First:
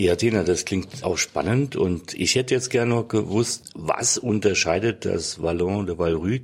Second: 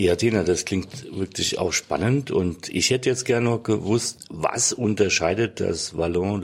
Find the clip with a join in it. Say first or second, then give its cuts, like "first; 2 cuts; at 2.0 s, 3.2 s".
first; 1 cut; at 1.0 s